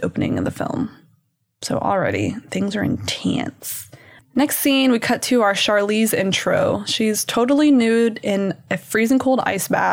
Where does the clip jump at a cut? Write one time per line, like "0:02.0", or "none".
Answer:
0:04.2